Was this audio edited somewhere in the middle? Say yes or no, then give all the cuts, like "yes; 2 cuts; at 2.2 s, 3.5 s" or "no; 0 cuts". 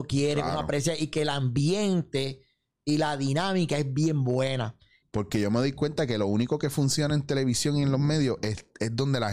yes; 1 cut; at 5.0 s